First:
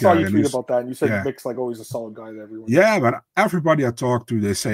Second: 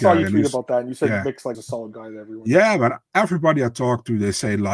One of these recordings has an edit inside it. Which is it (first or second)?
second